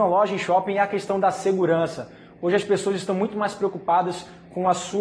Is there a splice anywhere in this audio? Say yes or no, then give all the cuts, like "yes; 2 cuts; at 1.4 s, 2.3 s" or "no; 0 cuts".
no; 0 cuts